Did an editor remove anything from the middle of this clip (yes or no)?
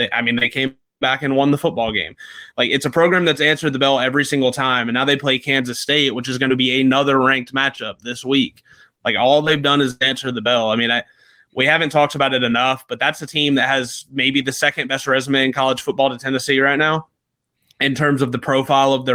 no